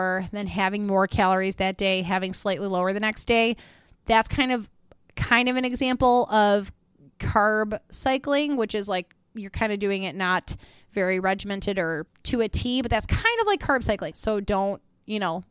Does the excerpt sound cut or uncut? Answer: cut